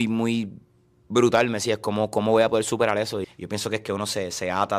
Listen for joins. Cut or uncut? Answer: cut